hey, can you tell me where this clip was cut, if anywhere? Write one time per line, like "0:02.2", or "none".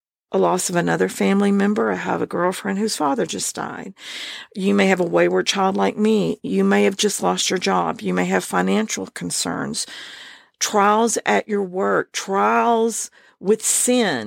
none